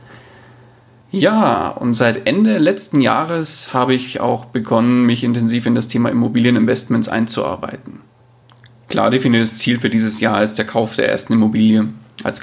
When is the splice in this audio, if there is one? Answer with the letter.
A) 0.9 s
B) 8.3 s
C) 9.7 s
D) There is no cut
D